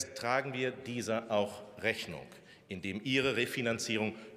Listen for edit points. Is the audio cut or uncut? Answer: uncut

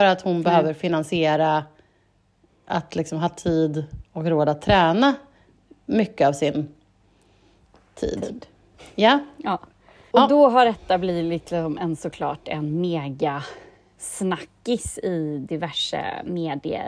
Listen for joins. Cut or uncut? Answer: cut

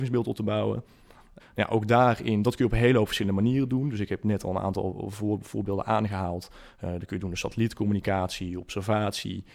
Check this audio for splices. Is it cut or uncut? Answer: cut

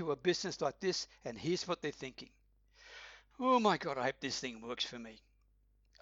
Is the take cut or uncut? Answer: uncut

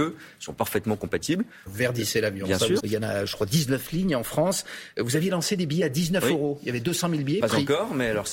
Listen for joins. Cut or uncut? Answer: cut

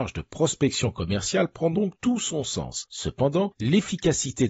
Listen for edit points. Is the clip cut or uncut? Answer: uncut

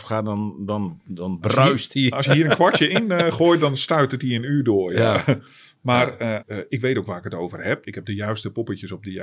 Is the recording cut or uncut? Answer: cut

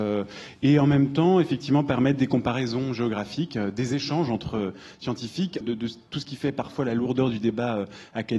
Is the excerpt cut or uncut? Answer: cut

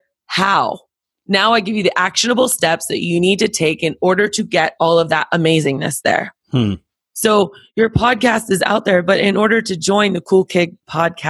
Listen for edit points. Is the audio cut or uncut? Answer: uncut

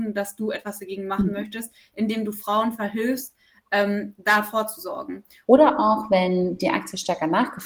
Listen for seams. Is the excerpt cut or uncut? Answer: cut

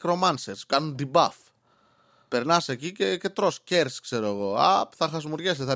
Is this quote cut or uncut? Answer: uncut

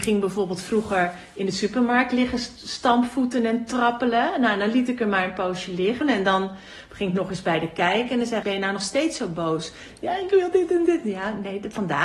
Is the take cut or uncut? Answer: cut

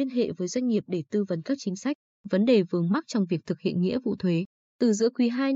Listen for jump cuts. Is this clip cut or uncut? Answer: uncut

